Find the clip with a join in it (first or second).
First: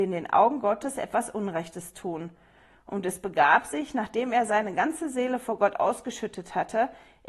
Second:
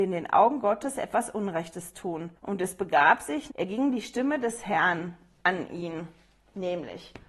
second